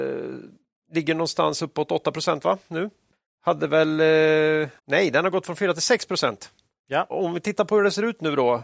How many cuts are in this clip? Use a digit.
2